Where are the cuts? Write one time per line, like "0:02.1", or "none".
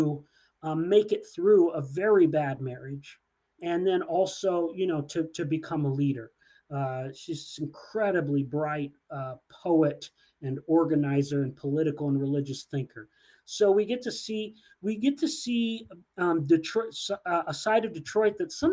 0:03.6